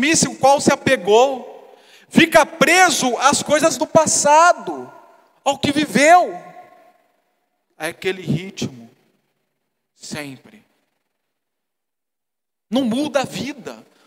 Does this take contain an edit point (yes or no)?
yes